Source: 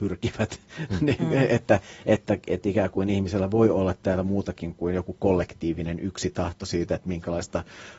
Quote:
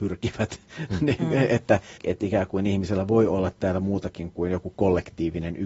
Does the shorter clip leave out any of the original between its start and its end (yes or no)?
yes